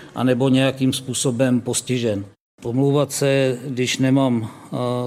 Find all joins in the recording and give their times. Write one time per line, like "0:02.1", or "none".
none